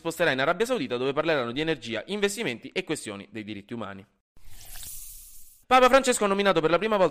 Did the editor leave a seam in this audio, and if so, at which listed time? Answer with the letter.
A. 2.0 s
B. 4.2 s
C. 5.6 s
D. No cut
C